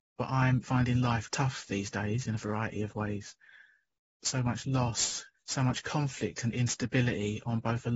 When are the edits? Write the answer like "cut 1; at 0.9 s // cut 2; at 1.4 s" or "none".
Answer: cut 1; at 1.3 s // cut 2; at 4.2 s // cut 3; at 5.3 s